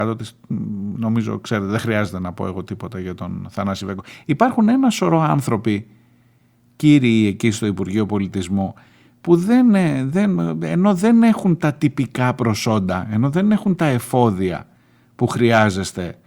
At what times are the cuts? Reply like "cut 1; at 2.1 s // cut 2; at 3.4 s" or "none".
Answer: none